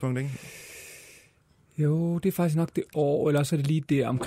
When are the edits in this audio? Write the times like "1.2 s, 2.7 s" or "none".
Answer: none